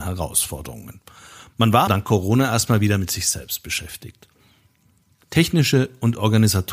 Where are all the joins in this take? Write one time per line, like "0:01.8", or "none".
0:01.9